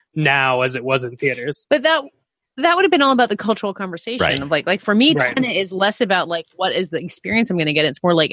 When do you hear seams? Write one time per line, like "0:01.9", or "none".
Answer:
none